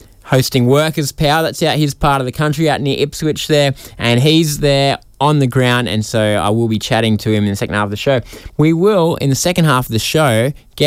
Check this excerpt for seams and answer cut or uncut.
cut